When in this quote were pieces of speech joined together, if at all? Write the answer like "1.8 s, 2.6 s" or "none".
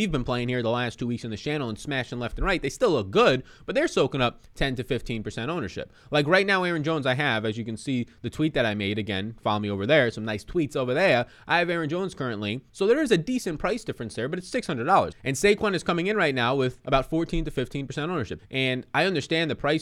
12.7 s, 15.1 s, 18.4 s

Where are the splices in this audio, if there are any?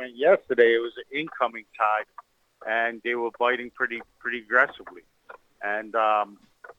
none

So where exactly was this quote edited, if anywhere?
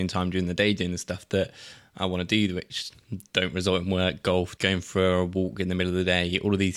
4.6 s

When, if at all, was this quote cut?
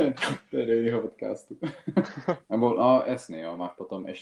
2.4 s

